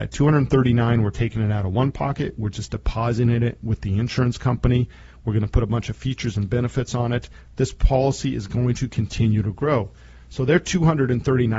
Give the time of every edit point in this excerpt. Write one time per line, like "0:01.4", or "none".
none